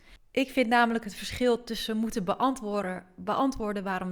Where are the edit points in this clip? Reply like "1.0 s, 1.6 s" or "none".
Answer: none

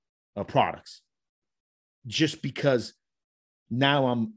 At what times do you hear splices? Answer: none

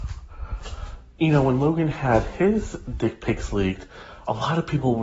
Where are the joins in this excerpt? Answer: none

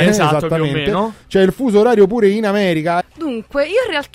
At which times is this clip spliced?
3.0 s

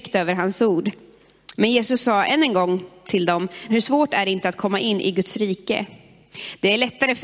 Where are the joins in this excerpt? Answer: 3.7 s

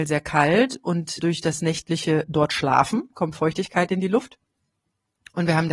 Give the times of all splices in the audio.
1.2 s, 3.1 s

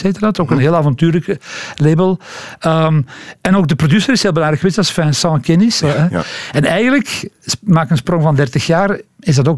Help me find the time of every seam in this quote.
5.8 s

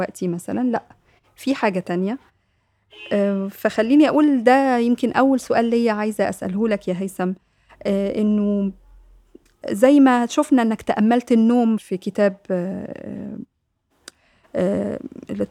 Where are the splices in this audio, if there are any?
11.8 s

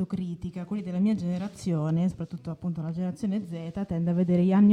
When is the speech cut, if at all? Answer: none

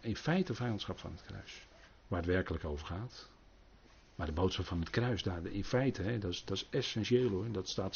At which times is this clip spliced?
1.9 s

